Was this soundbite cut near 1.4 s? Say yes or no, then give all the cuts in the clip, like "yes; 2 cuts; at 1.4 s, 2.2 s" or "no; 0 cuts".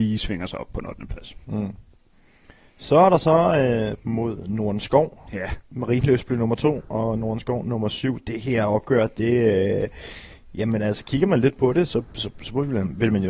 no; 1 cut; at 4.0 s